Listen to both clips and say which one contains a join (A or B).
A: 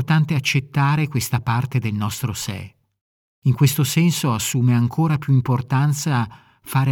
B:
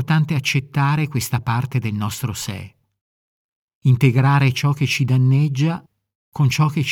A